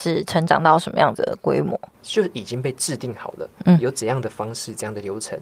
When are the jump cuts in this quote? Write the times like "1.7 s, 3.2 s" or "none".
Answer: 1.9 s